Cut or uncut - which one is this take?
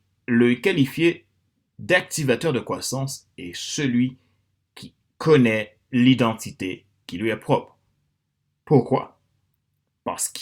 uncut